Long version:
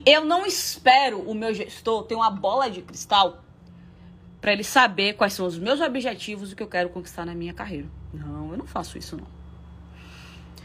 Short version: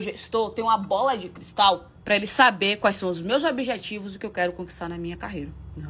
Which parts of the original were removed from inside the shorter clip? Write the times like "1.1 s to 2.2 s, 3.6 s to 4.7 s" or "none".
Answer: 3.5 s to 4.3 s